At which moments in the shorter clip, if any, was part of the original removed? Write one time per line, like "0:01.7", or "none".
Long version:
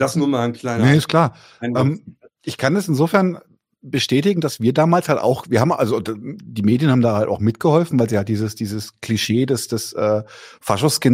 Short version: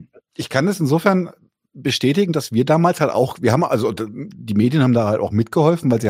none